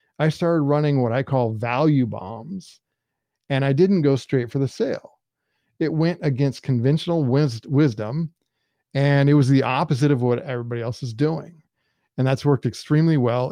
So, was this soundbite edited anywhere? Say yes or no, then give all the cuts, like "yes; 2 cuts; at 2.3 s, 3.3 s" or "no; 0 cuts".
no; 0 cuts